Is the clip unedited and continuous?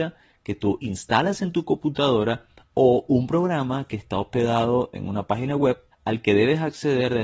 no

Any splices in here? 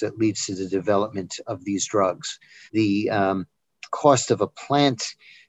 yes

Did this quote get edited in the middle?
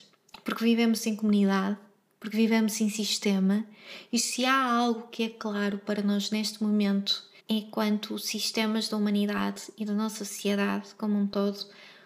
yes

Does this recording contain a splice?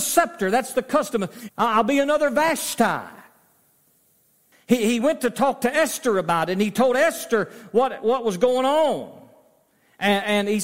yes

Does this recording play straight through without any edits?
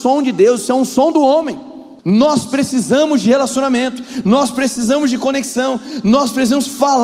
no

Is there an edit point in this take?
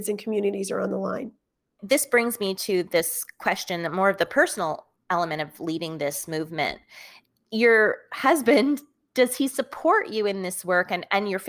no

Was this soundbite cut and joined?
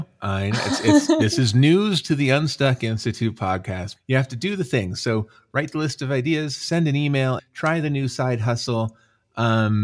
yes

